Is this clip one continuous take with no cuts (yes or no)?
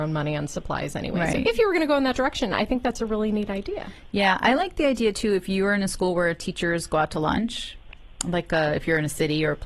yes